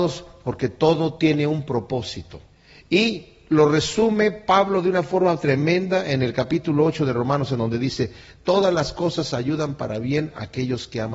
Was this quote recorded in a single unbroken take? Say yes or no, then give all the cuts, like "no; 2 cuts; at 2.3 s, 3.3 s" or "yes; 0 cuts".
yes; 0 cuts